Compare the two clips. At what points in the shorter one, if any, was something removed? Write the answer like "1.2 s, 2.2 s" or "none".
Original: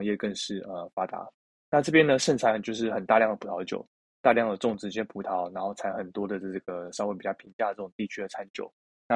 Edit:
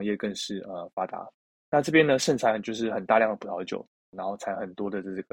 4.1 s